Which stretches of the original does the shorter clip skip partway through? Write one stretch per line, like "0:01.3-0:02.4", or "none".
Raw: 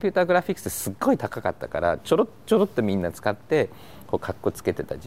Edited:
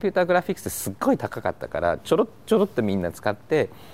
none

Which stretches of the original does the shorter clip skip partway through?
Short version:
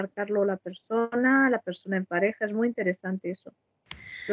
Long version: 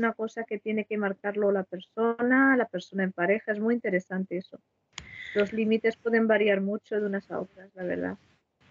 none

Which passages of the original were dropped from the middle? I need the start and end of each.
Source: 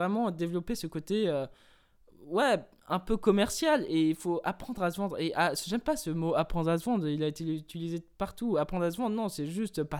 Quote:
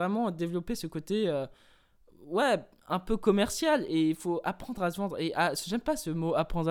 none

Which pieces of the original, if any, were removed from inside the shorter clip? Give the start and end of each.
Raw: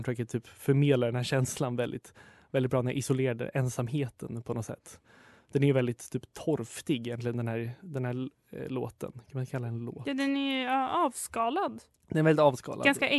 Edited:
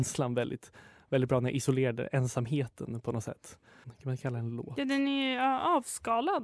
0:05.3-0:09.1

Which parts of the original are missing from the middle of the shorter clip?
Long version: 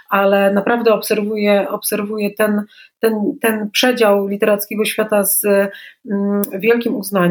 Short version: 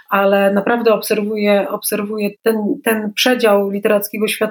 0:02.3-0:02.9

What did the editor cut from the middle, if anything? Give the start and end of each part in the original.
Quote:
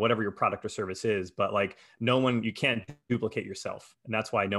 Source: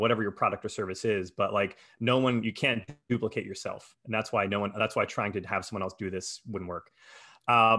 none

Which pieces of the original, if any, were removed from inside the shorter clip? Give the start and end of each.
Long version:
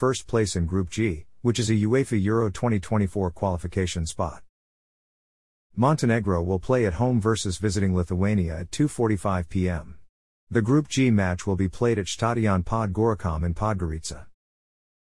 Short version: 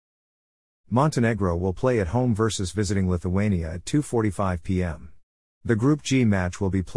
none

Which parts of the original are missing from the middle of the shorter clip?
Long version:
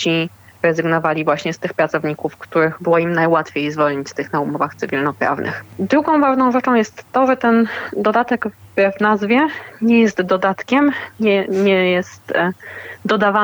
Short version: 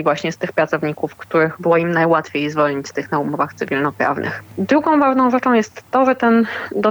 none

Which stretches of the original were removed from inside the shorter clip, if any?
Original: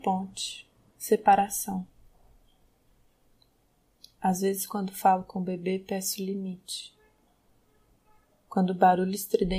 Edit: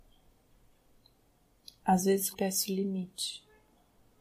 0:04.7-0:05.8

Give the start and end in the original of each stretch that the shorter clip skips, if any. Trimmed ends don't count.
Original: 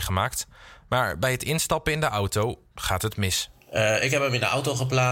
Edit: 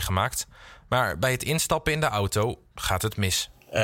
none

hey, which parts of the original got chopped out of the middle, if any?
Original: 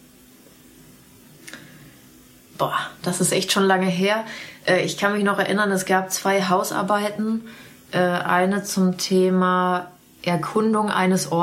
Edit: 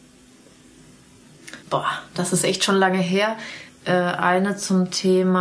0:01.6-0:02.5
0:04.6-0:07.7

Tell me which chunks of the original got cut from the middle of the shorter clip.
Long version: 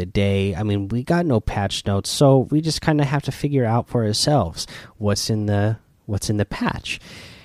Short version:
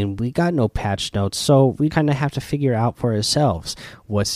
0:02.6-0:02.8

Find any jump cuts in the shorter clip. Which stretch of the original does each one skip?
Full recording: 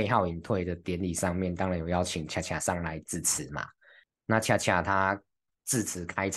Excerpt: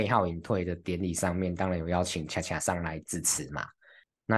none

